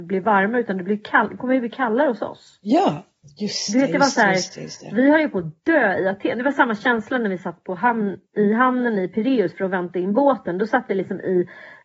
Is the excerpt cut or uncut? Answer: cut